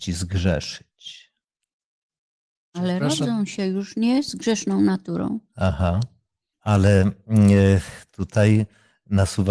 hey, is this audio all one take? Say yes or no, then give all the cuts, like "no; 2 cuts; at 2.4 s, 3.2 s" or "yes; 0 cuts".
no; 1 cut; at 6.5 s